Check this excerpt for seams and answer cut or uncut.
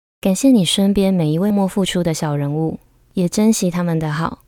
cut